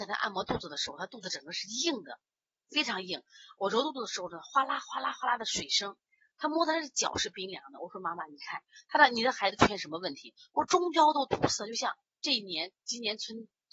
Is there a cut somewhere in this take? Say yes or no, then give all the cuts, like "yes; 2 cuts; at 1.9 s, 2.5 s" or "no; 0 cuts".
no; 0 cuts